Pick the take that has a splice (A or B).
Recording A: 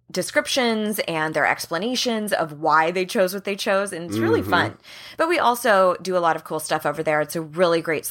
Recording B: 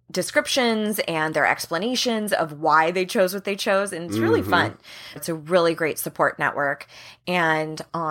B